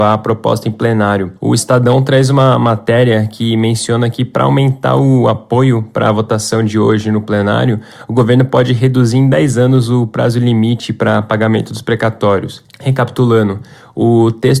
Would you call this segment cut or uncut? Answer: cut